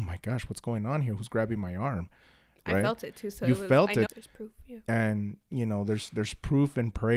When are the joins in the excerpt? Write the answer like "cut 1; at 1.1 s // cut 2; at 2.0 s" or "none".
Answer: cut 1; at 4.1 s